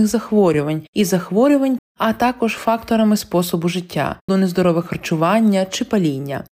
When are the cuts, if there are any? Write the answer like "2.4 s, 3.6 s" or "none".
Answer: 1.8 s, 4.3 s